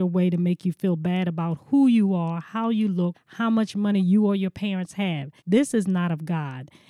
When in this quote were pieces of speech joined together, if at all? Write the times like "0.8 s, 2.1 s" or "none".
3.1 s, 5.4 s